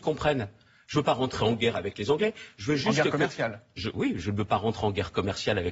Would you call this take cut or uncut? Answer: uncut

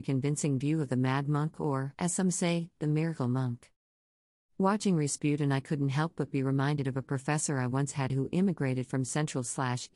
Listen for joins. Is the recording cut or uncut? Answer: cut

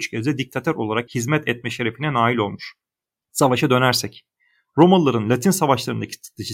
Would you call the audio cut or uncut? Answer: uncut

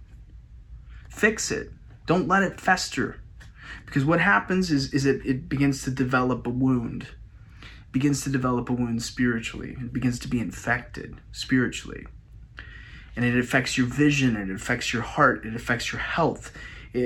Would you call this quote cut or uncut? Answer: uncut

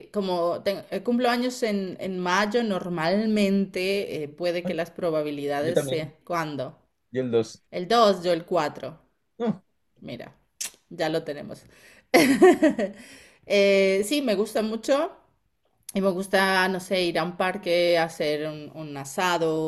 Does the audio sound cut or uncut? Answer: cut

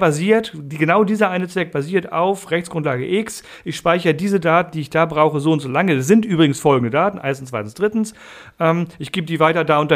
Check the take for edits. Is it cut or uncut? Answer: uncut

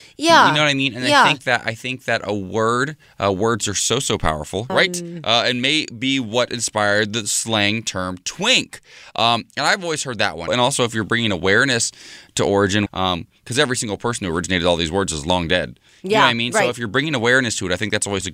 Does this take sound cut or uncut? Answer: cut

